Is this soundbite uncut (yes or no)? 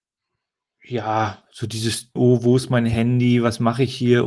no